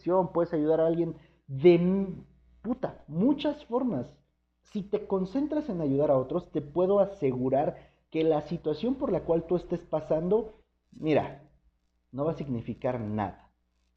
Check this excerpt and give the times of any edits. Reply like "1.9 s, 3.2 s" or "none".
none

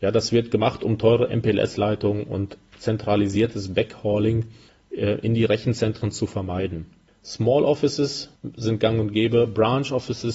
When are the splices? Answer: none

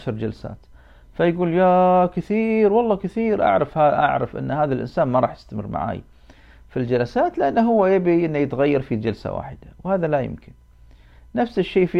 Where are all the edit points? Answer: none

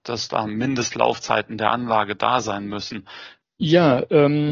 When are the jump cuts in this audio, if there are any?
3.4 s

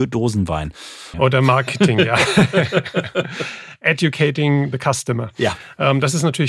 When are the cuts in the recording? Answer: 1.1 s

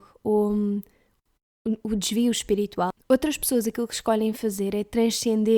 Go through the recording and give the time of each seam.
3.0 s

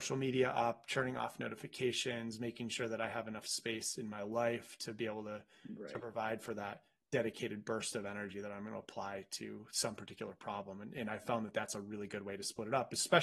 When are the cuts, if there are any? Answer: none

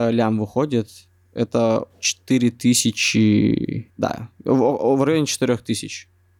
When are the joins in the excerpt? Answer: none

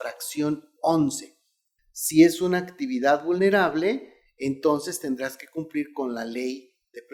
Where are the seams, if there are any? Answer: 1.8 s

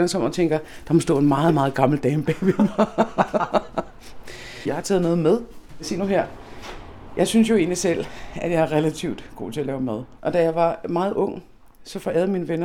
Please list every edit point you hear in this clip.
10.2 s

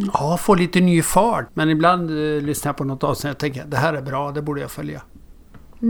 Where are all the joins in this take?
1.5 s

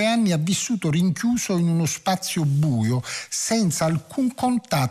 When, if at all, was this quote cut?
none

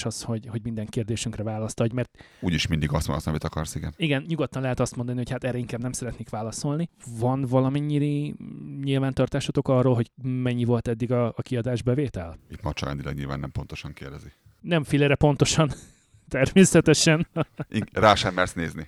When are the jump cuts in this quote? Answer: 4.3 s

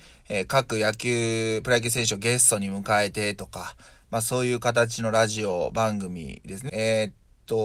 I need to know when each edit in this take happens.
6.7 s

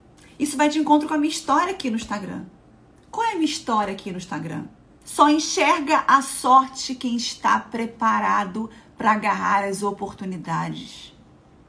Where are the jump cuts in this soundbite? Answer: 5.0 s

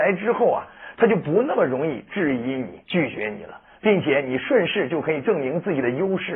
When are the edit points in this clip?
2.8 s

